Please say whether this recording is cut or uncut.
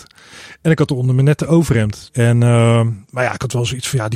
cut